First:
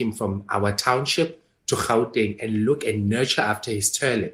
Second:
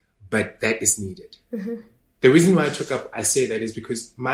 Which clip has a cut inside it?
second; 1 cut; at 3.1 s

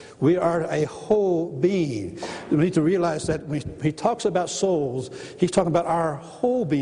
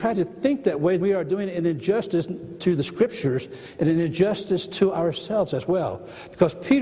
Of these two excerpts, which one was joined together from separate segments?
second; 1 cut; at 1.0 s

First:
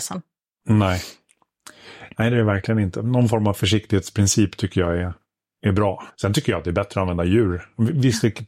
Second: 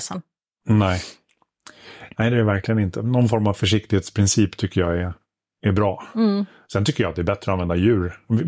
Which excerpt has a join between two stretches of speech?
first; 1 cut; at 6.1 s

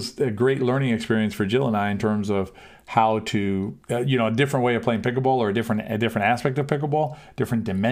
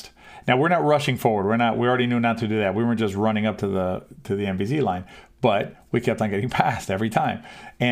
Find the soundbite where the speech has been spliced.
first; 1 cut; at 3.8 s

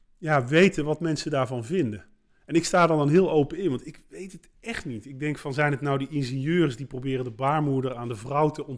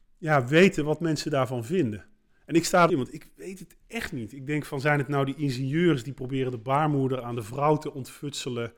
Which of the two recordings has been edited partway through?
second; 1 cut; at 2.9 s

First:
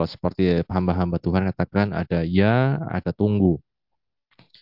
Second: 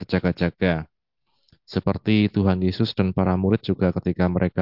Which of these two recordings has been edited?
first; 1 cut; at 2.9 s

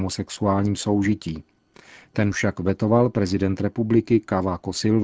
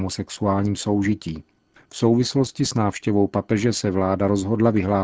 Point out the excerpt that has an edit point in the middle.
second; 1 cut; at 1.8 s

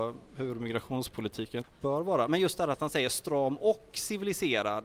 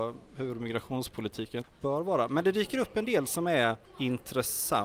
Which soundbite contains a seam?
second; 1 cut; at 2.3 s

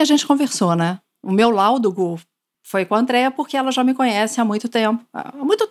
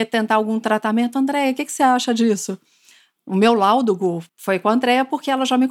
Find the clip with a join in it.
second; 2 cuts; at 3.2 s, 4.3 s

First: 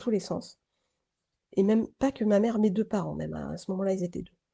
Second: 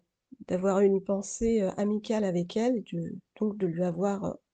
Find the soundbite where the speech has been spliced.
first; 1 cut; at 1.4 s

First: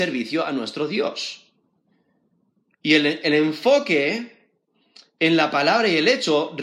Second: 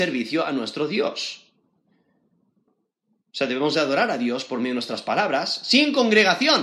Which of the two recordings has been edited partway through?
second; 1 cut; at 2.7 s

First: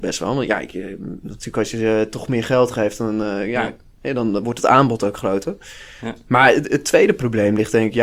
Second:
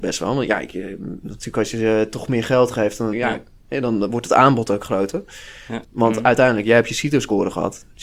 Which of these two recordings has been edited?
second; 2 cuts; at 3.1 s, 5.8 s

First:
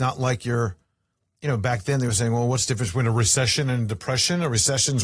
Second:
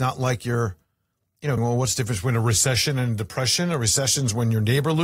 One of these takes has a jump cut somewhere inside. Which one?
second; 1 cut; at 1.6 s

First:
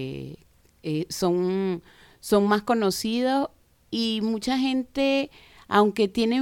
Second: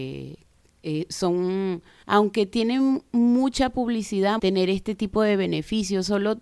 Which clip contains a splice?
second; 2 cuts; at 2.0 s, 4.4 s

